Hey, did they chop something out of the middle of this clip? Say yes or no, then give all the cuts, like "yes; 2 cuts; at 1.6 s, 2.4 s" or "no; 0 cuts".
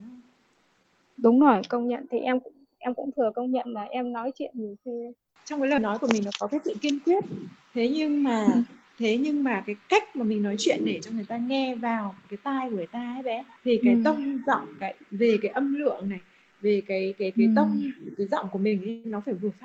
no; 0 cuts